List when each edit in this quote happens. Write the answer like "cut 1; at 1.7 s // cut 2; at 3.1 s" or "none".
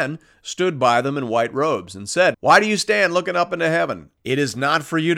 cut 1; at 2.3 s // cut 2; at 4.2 s